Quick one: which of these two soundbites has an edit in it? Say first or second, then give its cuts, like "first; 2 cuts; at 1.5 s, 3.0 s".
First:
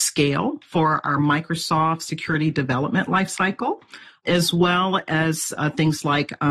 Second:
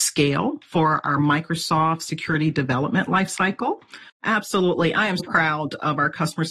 second; 2 cuts; at 4.1 s, 5.2 s